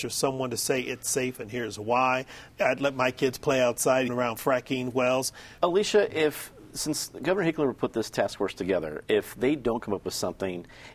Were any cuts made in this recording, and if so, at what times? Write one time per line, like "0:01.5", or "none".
0:02.5
0:04.1
0:05.6